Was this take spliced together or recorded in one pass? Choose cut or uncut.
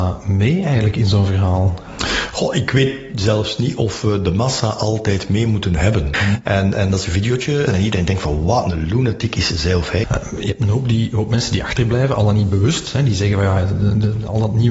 cut